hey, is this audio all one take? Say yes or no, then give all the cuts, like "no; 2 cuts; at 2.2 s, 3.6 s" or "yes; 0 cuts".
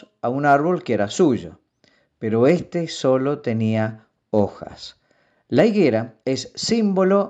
no; 1 cut; at 6.2 s